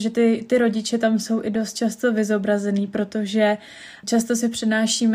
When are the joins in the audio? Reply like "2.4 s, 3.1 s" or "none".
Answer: 4.0 s